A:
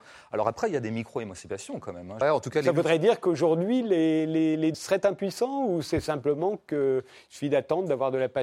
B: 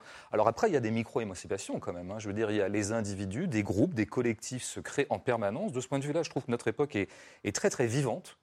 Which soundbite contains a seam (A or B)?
A